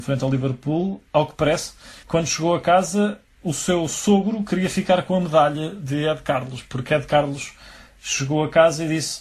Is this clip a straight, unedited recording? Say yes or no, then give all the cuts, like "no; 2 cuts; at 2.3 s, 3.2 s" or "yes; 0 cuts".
no; 1 cut; at 2.0 s